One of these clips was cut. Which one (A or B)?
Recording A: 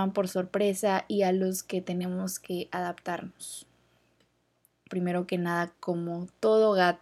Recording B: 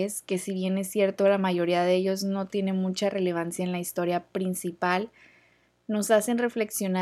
A